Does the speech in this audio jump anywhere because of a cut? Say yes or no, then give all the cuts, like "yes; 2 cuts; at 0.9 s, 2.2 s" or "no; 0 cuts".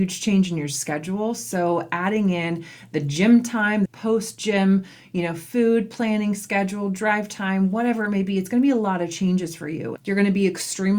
yes; 2 cuts; at 3.9 s, 10.0 s